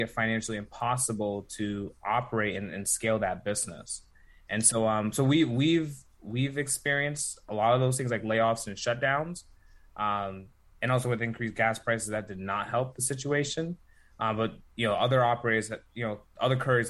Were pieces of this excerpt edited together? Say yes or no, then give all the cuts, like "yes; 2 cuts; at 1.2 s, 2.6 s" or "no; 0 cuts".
no; 0 cuts